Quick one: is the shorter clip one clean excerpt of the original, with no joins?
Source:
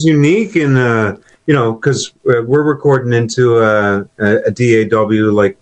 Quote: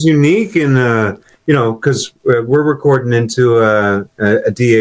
yes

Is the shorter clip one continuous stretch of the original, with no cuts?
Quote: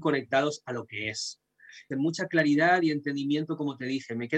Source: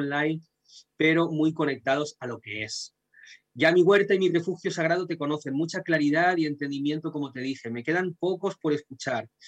no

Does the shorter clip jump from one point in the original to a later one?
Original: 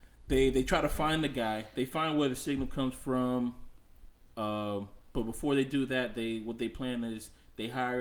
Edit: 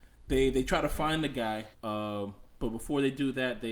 yes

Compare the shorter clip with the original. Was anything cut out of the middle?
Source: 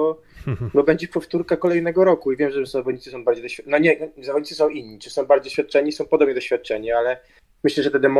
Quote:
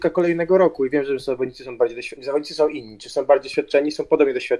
yes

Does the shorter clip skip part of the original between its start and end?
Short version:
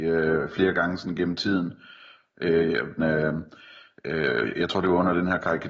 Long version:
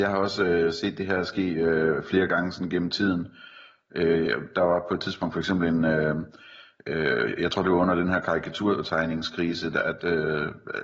yes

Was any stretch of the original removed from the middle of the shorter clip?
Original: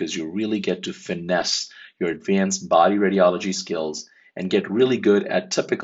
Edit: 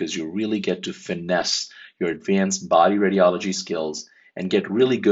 no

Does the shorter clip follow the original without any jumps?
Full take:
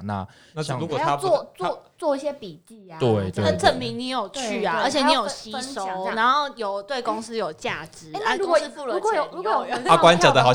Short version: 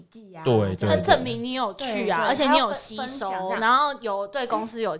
yes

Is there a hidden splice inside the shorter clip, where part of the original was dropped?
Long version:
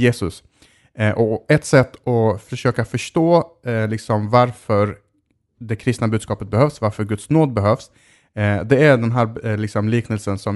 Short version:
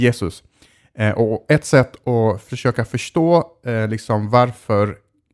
no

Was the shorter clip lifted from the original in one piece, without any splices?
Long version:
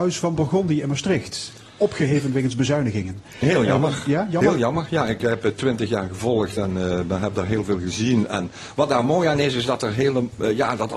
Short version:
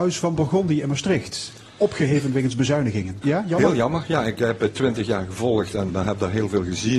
no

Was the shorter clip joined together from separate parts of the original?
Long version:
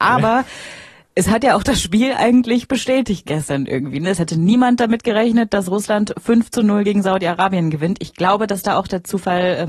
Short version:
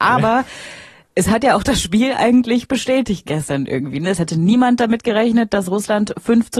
no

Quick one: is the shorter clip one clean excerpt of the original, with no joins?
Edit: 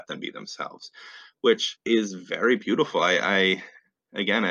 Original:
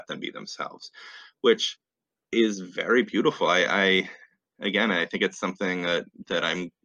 no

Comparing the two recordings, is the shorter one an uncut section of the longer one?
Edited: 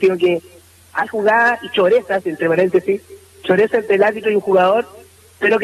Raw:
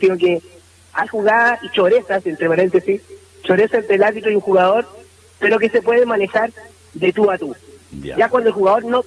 yes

